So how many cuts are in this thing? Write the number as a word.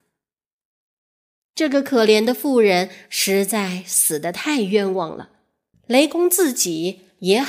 one